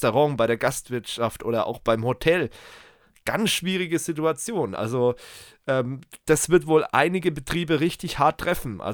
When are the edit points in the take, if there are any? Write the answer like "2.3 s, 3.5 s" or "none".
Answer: none